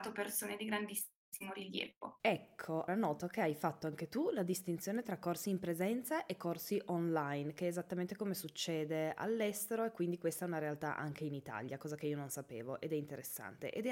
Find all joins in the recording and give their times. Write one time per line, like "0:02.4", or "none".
0:02.9